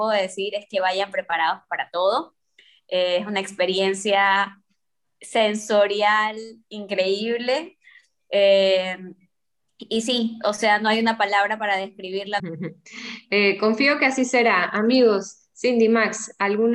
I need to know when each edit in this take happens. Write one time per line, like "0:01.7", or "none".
0:12.4